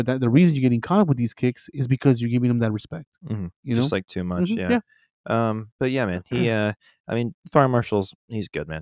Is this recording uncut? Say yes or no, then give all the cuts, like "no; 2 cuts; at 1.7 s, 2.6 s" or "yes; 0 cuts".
yes; 0 cuts